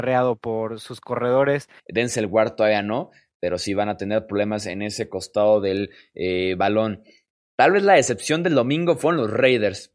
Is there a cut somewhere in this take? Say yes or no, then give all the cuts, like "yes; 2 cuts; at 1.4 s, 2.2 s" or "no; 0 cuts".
yes; 1 cut; at 1.8 s